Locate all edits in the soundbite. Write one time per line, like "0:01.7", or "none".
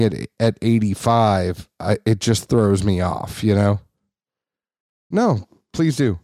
0:05.1